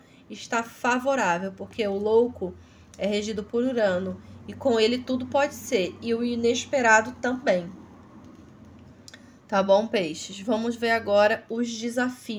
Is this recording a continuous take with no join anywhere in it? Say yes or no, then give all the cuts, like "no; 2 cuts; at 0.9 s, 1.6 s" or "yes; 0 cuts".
yes; 0 cuts